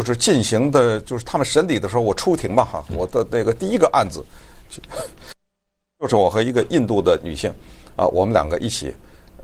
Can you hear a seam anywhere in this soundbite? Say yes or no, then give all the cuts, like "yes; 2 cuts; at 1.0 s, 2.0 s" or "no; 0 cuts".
no; 0 cuts